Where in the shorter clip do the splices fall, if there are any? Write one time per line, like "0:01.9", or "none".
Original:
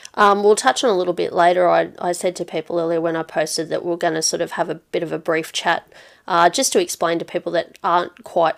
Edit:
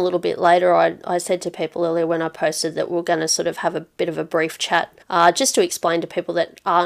0:05.0